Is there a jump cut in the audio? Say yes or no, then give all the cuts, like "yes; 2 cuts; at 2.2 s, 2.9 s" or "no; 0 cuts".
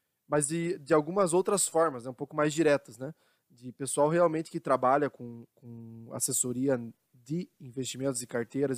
no; 0 cuts